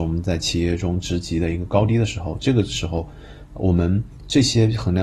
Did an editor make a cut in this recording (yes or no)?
no